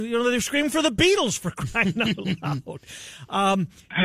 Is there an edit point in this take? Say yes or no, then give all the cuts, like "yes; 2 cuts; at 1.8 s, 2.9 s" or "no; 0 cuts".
no; 0 cuts